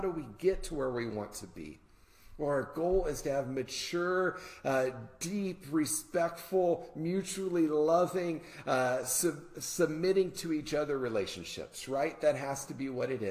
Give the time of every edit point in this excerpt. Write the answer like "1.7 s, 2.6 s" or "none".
none